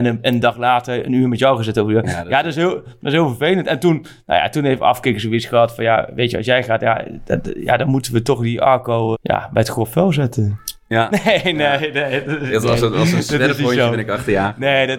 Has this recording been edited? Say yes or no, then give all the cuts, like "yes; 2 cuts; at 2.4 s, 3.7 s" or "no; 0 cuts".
yes; 1 cut; at 9.1 s